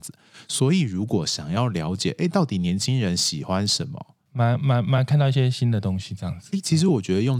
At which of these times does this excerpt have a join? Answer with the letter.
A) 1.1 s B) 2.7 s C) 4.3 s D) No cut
C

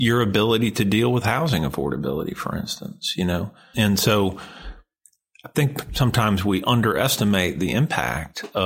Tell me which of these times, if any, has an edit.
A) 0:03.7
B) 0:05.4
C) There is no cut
A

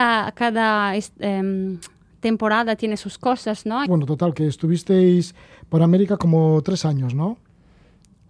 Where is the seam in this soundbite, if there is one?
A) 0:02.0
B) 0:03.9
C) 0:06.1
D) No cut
B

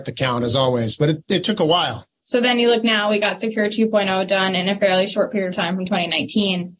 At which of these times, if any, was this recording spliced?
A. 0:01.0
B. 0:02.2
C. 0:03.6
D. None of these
B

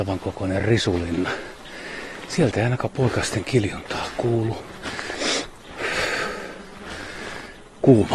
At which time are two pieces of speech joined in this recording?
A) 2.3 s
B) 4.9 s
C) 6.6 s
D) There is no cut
A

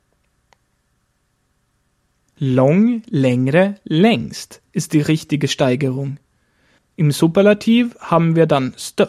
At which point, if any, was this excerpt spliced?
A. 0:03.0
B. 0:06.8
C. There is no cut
B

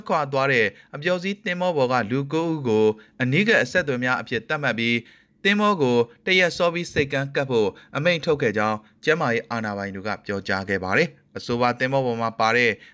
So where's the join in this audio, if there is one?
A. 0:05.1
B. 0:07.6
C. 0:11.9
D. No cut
D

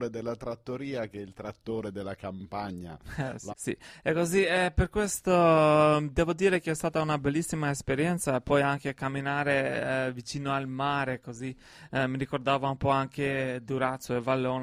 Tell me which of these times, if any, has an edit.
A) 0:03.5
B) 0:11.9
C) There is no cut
A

